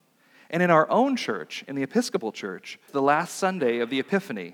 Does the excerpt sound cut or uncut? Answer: cut